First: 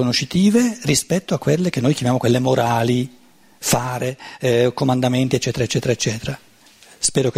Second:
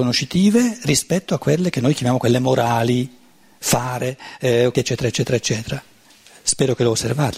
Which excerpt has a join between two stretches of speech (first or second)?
second